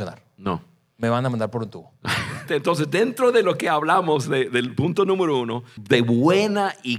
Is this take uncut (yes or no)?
no